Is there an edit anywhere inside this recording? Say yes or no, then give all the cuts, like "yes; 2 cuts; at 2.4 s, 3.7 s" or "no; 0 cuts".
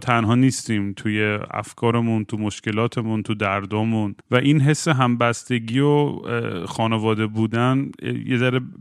yes; 1 cut; at 4.2 s